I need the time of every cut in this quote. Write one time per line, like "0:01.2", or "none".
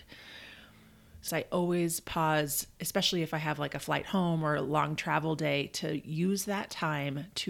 0:01.3